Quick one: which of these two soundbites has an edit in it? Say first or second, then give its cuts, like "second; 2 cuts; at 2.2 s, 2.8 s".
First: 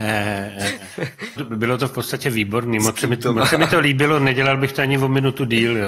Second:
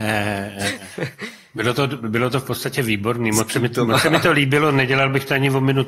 first; 1 cut; at 1.4 s